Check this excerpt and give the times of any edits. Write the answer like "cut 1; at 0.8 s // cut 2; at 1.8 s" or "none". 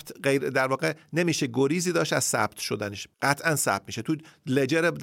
cut 1; at 3.1 s